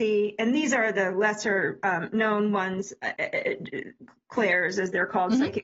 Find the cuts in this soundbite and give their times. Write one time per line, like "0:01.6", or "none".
none